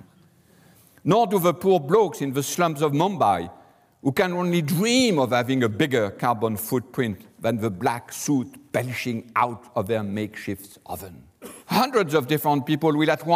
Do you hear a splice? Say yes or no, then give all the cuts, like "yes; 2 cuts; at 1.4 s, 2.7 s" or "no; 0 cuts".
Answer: yes; 1 cut; at 11.6 s